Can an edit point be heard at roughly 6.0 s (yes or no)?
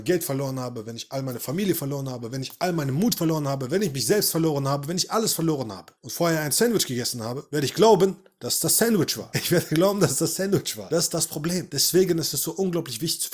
yes